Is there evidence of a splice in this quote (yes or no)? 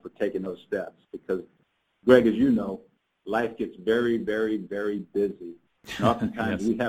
no